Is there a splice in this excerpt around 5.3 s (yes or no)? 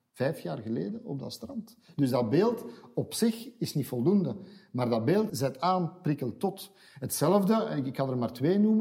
yes